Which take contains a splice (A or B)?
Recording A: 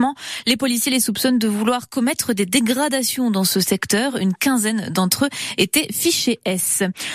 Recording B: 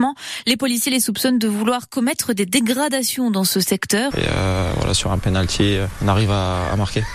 B